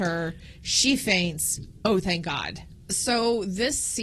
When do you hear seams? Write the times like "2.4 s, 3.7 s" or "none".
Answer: none